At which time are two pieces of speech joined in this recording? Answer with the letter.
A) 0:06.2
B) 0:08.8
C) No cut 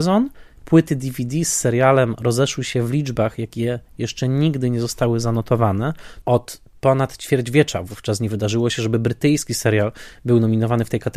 A